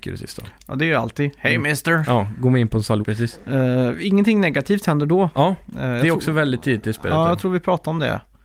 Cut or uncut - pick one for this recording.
cut